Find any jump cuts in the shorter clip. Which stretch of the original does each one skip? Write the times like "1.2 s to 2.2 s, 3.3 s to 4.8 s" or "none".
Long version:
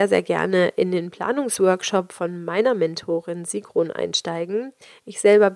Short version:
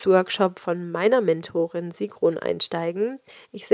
none